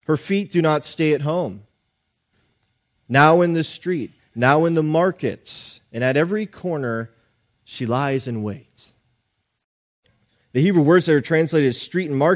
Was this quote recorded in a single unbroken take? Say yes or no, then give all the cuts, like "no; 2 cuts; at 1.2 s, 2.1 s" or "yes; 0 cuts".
yes; 0 cuts